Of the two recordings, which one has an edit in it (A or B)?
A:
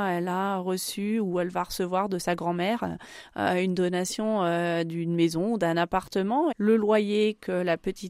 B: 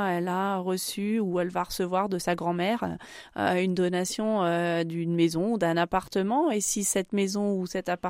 A